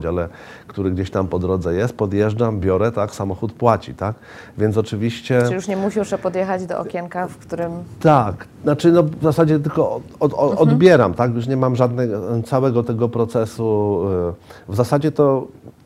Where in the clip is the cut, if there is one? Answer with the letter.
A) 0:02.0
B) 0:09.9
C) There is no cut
C